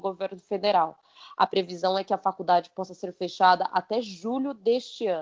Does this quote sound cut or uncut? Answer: uncut